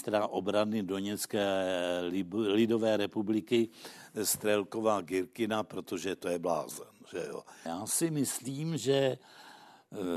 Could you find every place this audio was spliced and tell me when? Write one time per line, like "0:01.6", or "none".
0:07.7

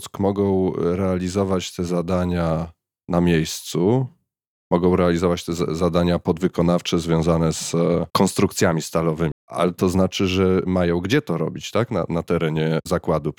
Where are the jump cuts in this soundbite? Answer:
0:08.1
0:09.3

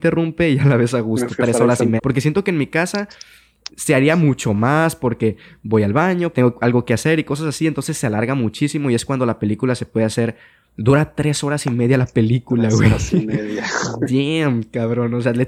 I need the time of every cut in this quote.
0:02.0
0:06.3
0:10.6

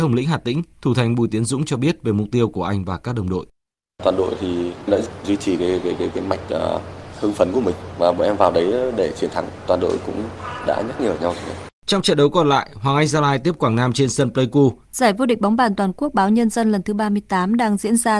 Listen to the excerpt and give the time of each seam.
0:05.6
0:11.8
0:14.8

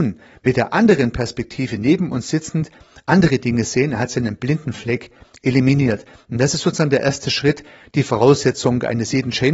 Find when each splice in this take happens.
none

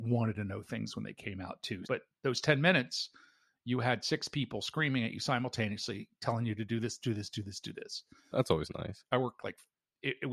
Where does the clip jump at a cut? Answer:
0:01.8
0:08.3

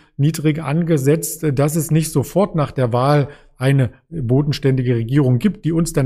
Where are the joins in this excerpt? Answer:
none

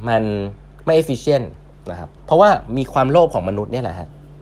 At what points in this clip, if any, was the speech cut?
0:02.2

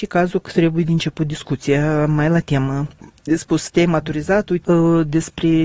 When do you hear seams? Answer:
0:04.6

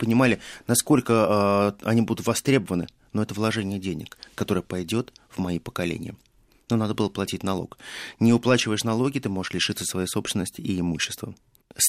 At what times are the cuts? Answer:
none

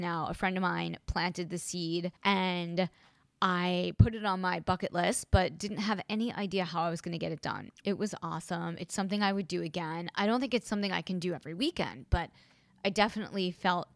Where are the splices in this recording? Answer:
0:02.2
0:07.8

